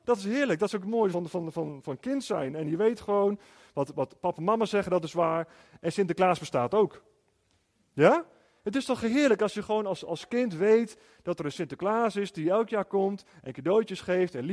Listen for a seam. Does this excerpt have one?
no; 0 cuts

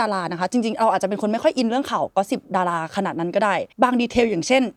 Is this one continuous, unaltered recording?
no; 1 cut; at 3.7 s

